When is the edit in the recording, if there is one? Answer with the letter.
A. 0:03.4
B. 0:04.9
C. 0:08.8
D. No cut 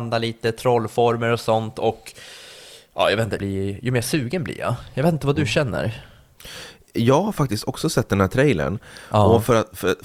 A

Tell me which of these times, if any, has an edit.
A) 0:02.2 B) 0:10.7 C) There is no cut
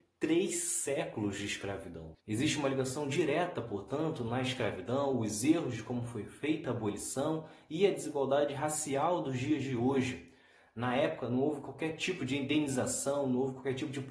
A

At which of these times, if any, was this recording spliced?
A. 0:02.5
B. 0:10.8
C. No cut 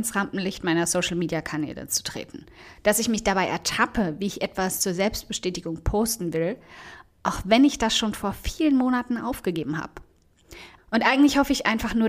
B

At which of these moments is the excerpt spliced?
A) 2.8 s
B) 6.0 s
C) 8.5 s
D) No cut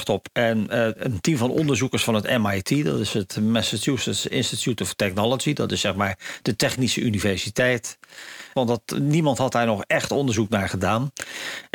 C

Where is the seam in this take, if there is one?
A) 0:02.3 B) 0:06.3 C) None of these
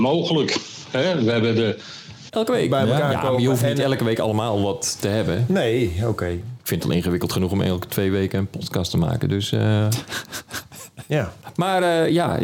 A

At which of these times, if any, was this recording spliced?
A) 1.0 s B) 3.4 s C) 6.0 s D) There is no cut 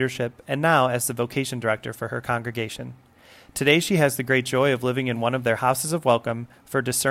D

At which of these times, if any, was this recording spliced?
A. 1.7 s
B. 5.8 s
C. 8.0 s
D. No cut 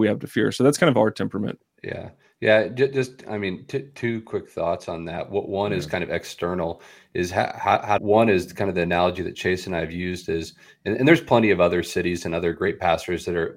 C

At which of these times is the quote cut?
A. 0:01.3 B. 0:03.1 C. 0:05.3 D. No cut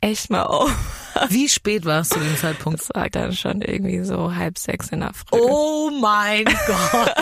B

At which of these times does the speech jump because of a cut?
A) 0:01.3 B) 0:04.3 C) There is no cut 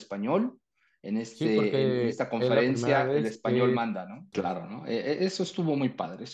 B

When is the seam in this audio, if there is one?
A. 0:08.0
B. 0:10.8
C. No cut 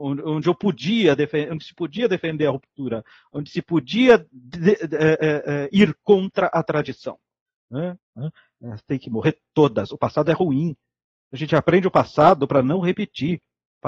A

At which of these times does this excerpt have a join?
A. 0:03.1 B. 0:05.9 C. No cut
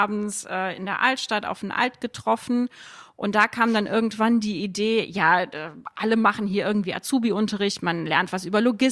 C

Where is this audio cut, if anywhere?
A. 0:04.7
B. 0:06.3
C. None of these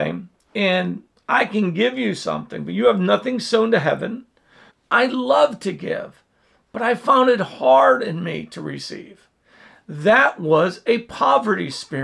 A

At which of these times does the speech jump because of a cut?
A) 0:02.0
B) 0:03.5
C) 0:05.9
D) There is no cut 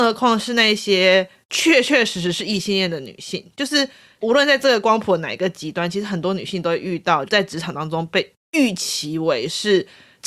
D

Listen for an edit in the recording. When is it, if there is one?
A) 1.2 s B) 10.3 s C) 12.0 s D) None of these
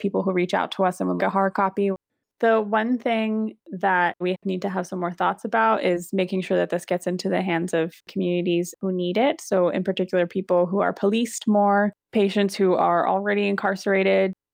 A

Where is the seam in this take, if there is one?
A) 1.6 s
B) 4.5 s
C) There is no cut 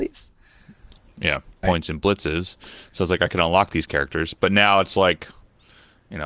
A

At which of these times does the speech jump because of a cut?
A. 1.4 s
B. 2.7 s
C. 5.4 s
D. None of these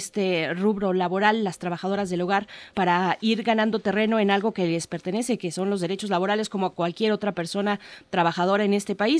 B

